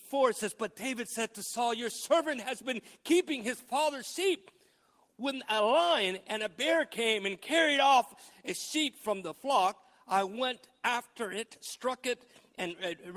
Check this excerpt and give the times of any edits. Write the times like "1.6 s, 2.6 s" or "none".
none